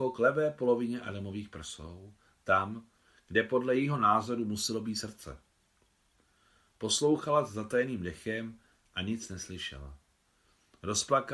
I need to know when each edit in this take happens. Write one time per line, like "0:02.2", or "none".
none